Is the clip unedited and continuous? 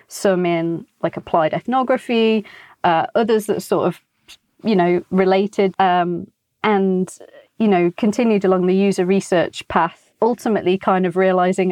no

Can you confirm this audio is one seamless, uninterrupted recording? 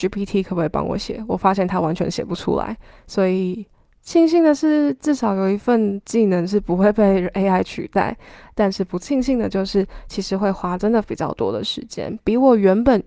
yes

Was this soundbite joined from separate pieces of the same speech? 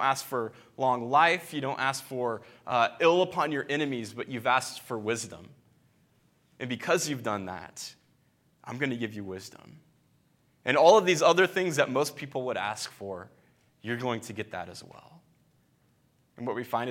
no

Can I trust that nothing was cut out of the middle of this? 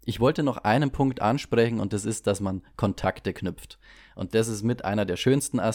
yes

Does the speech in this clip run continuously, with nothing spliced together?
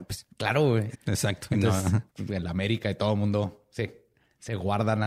no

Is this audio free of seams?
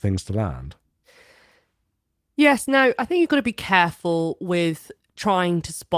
yes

